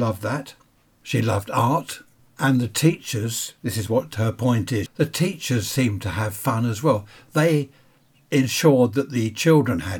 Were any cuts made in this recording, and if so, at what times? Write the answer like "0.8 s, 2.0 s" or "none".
4.9 s